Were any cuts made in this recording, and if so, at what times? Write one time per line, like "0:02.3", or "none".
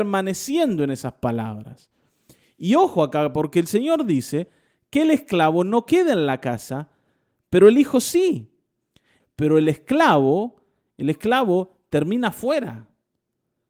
0:09.2